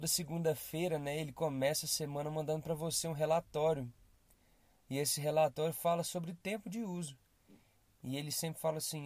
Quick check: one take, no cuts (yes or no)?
yes